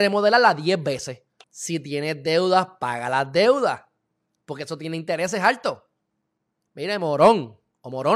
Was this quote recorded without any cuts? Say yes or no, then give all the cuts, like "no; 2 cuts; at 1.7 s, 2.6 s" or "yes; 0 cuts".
no; 2 cuts; at 1.4 s, 6.7 s